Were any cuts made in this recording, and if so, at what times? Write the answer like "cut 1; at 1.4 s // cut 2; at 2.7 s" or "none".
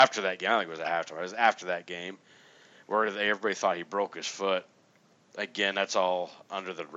none